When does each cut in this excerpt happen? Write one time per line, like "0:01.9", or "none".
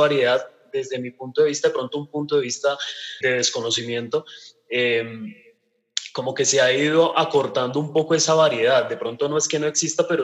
0:03.2